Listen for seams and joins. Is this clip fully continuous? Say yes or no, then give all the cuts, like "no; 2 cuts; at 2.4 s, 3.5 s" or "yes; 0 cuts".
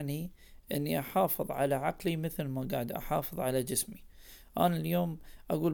yes; 0 cuts